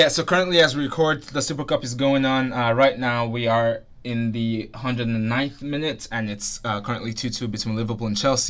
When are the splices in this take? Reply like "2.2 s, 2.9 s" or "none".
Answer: none